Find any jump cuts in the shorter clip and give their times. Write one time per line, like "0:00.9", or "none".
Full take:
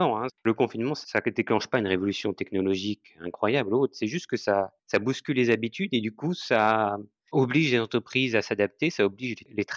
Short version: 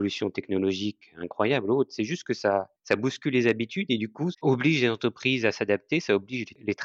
0:04.3